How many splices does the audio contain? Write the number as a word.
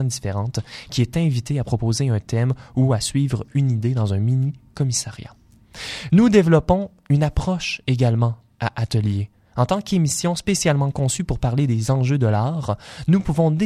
one